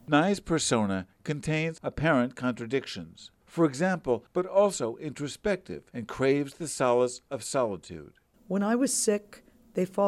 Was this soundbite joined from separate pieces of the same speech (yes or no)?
yes